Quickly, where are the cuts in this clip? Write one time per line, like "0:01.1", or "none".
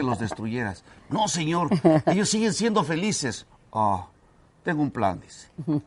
none